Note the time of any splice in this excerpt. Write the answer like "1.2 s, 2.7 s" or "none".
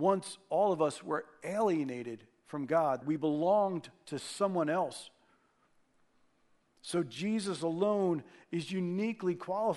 3.0 s, 6.6 s